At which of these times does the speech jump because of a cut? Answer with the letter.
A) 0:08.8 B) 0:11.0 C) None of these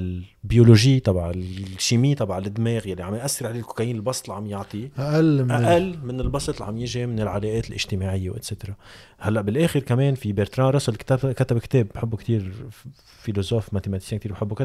C